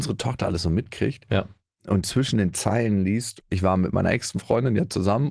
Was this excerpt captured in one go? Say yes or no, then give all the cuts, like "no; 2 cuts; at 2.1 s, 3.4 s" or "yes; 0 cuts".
no; 1 cut; at 3.4 s